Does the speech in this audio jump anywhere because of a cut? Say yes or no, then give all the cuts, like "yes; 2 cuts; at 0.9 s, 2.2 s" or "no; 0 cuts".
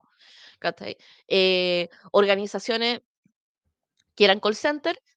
no; 0 cuts